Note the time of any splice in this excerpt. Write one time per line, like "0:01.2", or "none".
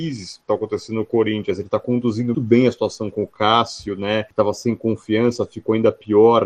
0:02.3